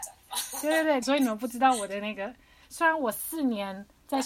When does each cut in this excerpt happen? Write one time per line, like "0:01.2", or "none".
0:01.0
0:02.6